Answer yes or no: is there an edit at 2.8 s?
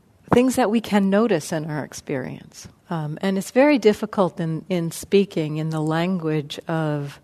yes